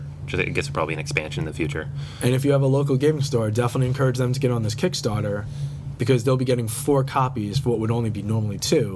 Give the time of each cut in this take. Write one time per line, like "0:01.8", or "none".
none